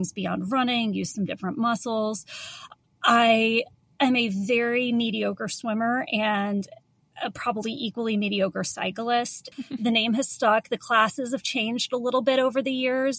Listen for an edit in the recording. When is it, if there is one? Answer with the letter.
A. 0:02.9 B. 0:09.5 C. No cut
B